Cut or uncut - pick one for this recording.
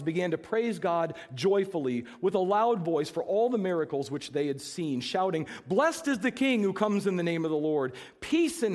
uncut